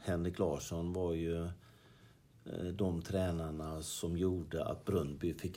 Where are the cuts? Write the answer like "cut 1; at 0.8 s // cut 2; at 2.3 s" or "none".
none